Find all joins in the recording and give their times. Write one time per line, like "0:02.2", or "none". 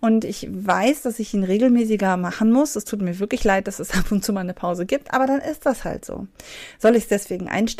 none